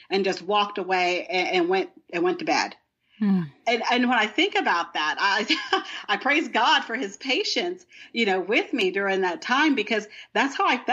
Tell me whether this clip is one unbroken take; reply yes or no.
yes